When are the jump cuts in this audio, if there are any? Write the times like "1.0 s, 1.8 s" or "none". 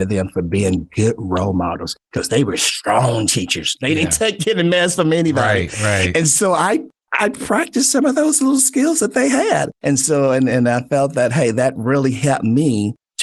none